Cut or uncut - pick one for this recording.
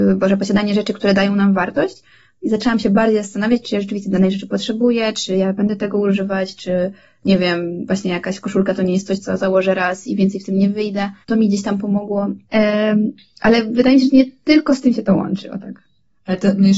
cut